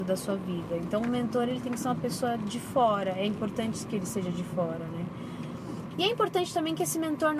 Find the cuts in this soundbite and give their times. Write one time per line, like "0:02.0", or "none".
0:05.9

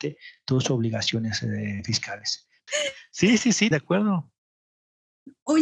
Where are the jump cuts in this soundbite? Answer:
0:02.7
0:03.7

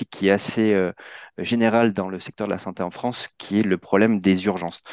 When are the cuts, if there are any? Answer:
none

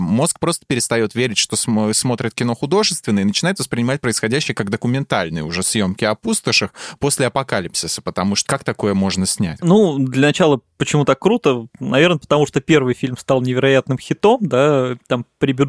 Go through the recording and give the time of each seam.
0:08.5
0:09.6

